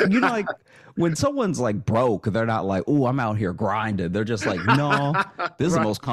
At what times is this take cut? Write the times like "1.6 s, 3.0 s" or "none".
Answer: none